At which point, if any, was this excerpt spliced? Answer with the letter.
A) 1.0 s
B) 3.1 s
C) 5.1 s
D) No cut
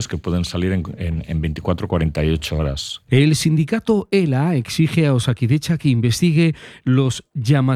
B